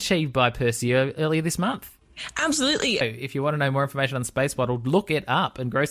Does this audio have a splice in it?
yes; 1 cut; at 3.0 s

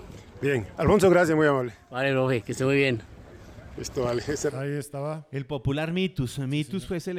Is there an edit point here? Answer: no; 0 cuts

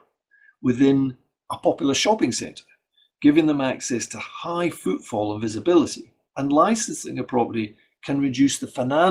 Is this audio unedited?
no; 1 cut; at 6.3 s

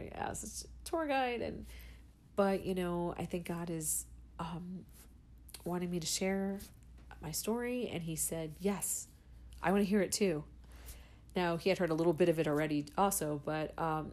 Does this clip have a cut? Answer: no; 0 cuts

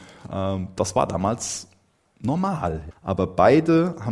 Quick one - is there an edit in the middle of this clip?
yes; 1 cut; at 2.9 s

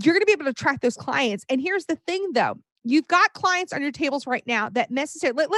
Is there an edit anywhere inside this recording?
no; 0 cuts

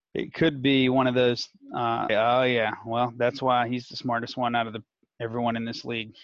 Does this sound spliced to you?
yes; 1 cut; at 2.1 s

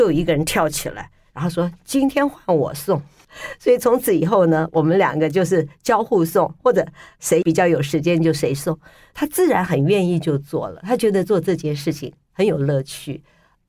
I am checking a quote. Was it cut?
no; 0 cuts

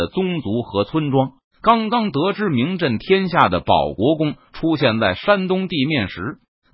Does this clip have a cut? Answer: yes; 1 cut; at 1.4 s

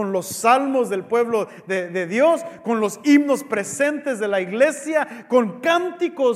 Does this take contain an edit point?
no; 0 cuts

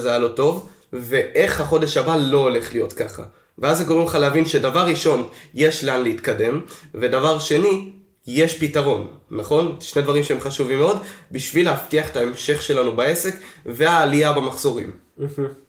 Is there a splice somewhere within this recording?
no; 0 cuts

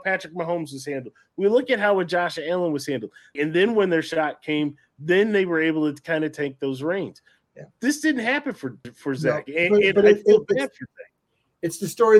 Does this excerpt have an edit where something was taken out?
yes; 2 cuts; at 3.4 s, 8.8 s

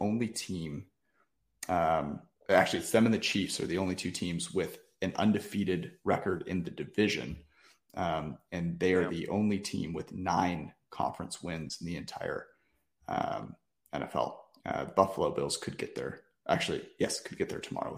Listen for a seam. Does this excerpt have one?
no; 0 cuts

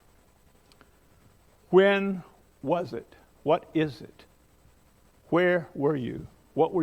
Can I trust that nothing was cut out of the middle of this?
yes; 0 cuts

